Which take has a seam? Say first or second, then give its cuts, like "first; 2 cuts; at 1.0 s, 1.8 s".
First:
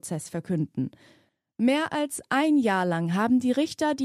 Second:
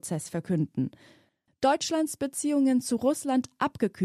second; 1 cut; at 1.5 s